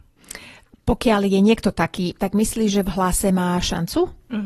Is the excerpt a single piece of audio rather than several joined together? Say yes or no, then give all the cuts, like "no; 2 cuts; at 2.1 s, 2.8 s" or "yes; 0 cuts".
no; 1 cut; at 2.2 s